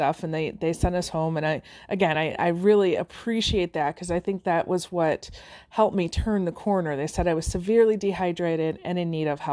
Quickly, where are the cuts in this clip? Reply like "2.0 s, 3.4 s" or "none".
none